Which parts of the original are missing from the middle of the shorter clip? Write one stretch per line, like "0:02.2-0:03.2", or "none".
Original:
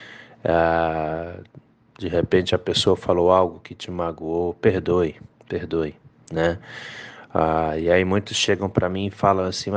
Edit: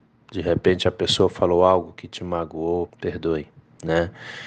0:04.6-0:05.4